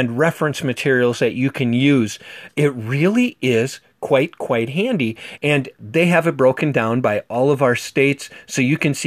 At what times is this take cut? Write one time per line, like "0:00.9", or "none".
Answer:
0:02.5
0:05.4